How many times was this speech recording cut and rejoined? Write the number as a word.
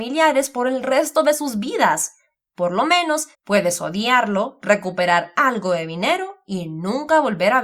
one